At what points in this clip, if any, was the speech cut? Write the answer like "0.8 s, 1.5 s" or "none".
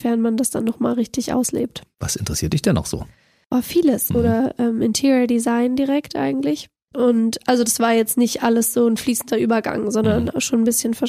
4.1 s, 6.9 s